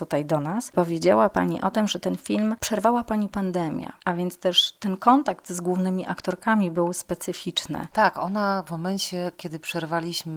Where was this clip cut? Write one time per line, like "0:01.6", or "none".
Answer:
0:07.9